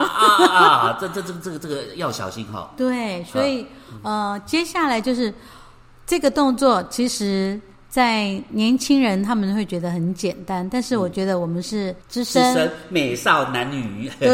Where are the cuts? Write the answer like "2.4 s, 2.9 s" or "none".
12.0 s